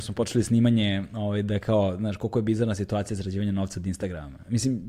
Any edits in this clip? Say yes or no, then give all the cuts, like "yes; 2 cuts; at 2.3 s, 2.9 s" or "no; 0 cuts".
no; 0 cuts